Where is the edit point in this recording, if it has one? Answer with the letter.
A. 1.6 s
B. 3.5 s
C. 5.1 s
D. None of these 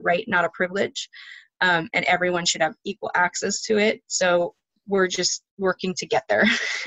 D